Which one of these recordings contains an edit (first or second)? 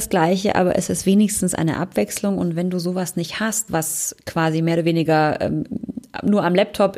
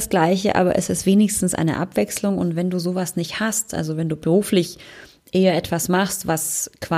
first